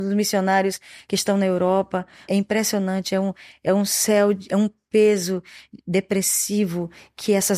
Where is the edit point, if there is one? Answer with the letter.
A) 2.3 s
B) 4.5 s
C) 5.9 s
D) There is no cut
A